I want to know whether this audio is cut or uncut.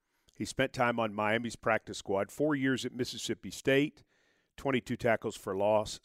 uncut